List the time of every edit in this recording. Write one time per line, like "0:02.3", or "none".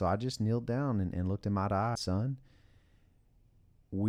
0:02.0